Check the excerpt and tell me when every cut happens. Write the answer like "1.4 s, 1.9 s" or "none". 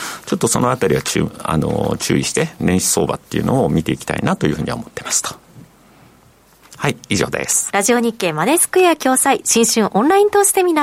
7.7 s